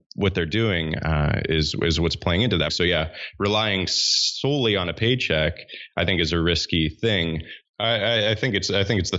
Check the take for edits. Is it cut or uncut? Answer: cut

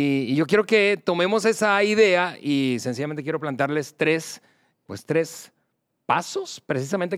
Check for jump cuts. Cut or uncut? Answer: cut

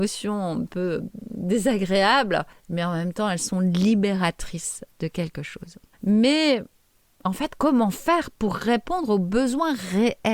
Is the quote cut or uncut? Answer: cut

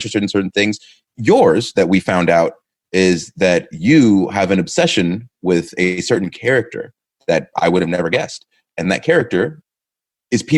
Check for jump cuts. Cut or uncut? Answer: uncut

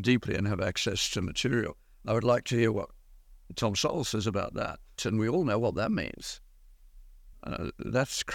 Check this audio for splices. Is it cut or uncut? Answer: cut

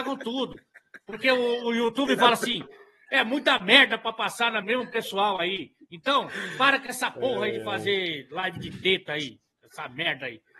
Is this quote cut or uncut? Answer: cut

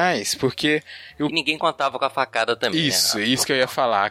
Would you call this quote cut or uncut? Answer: uncut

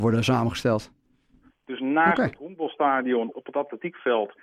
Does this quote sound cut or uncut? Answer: cut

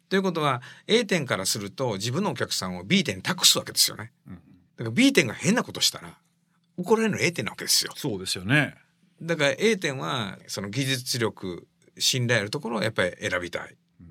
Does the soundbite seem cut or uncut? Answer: uncut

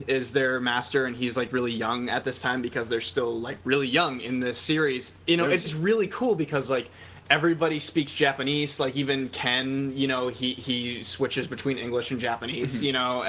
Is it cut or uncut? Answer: cut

